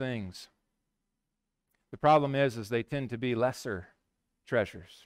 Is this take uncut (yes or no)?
yes